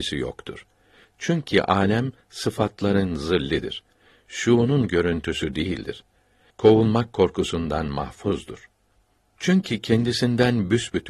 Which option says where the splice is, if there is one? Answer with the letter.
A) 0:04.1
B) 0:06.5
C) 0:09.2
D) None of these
B